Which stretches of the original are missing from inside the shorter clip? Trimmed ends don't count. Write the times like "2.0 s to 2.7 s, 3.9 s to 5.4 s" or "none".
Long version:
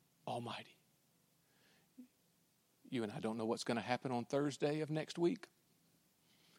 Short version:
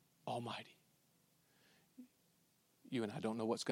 none

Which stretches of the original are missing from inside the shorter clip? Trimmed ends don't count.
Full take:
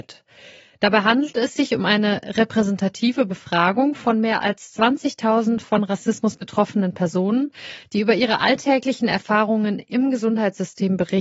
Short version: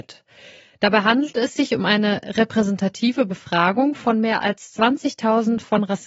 none

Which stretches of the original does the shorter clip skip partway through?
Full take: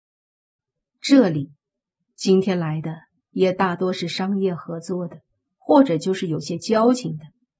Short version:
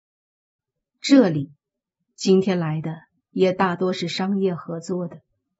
none

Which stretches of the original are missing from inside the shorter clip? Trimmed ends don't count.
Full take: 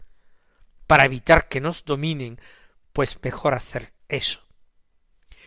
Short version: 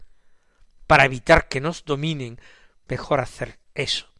2.9 s to 3.2 s

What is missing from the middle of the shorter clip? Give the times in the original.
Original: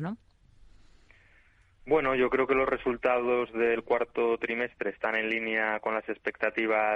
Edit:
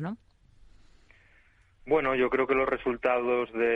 none

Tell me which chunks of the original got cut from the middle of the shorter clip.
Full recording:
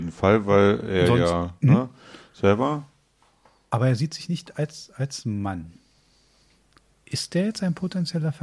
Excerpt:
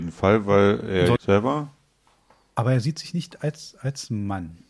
1.2 s to 2.3 s

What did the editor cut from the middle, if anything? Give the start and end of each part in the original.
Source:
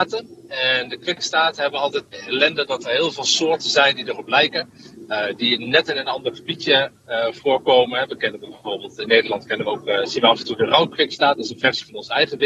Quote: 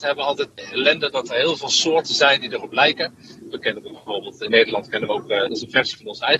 5.1 s to 8.1 s, 10.0 s to 11.4 s

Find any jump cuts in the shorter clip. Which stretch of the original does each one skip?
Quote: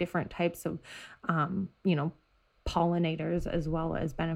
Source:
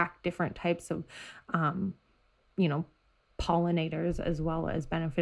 2.0 s to 2.5 s

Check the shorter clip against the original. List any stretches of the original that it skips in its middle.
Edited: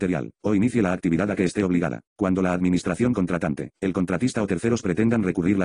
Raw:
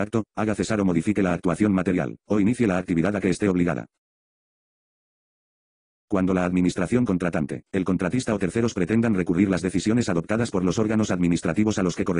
3.9 s to 6.0 s

